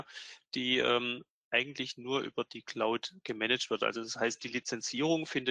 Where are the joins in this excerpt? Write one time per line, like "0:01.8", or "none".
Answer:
none